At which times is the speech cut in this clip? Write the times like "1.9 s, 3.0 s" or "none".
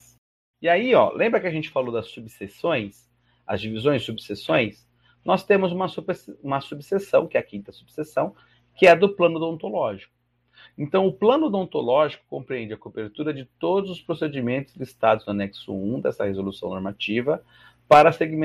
none

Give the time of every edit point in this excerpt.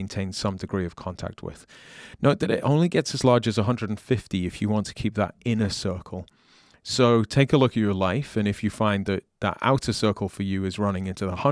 none

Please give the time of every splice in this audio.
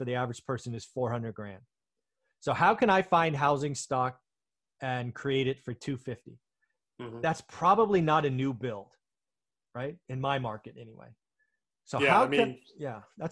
none

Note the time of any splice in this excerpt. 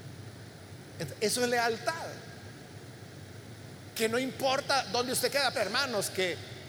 5.5 s

